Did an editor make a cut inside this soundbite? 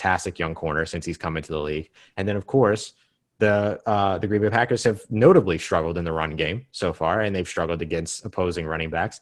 no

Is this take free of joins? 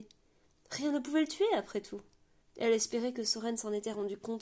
no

